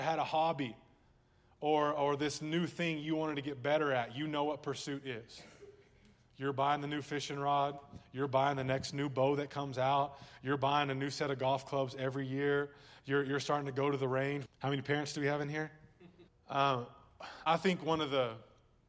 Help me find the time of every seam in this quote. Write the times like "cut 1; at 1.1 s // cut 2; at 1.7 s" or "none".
cut 1; at 14.5 s // cut 2; at 16.3 s // cut 3; at 17.5 s